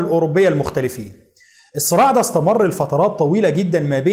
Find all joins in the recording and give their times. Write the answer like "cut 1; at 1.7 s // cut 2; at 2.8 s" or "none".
none